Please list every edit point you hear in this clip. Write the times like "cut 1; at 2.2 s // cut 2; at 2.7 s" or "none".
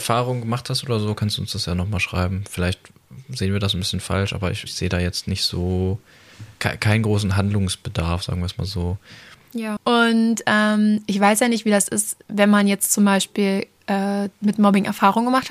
cut 1; at 4.7 s // cut 2; at 9.8 s

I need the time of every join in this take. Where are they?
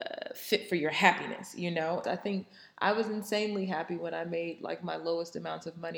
cut 1; at 2.0 s

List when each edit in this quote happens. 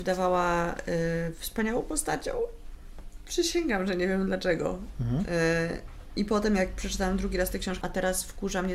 cut 1; at 7.8 s

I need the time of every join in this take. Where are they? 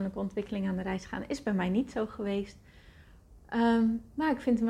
none

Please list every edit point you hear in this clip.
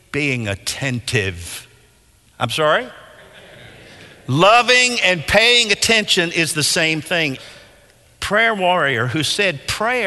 cut 1; at 2.3 s // cut 2; at 7.4 s

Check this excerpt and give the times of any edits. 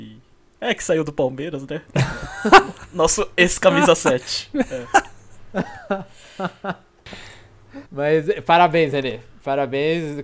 cut 1; at 1.9 s // cut 2; at 7.8 s

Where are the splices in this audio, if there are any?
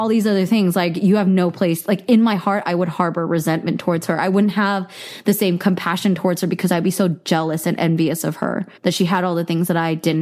cut 1; at 8.8 s

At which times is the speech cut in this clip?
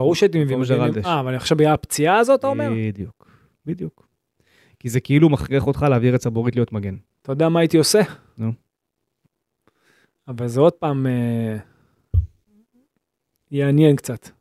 none

